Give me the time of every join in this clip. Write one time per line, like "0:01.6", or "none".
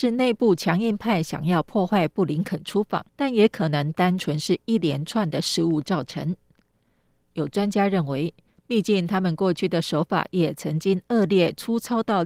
0:03.1
0:08.5